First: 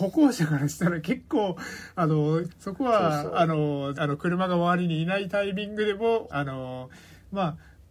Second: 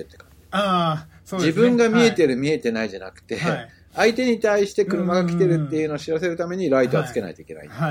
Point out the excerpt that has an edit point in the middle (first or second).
first